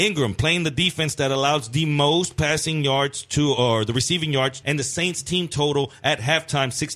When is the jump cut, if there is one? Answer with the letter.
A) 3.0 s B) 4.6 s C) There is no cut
B